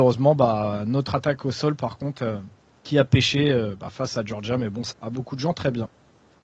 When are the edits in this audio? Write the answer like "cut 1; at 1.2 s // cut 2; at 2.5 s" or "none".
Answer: cut 1; at 4.9 s